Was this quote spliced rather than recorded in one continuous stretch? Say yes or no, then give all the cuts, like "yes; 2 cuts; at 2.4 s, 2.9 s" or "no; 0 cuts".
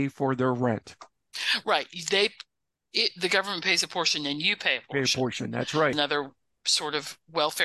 yes; 1 cut; at 5.9 s